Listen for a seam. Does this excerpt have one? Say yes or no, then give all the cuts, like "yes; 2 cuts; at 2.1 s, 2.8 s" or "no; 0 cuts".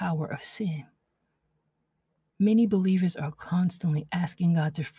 no; 0 cuts